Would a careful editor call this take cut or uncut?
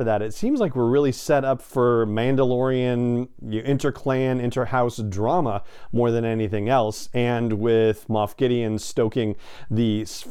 uncut